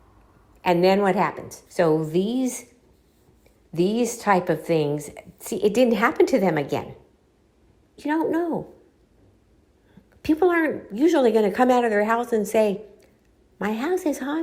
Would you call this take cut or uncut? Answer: cut